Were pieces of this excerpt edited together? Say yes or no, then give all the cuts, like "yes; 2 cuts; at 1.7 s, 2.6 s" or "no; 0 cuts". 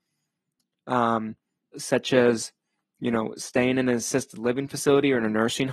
yes; 1 cut; at 1.7 s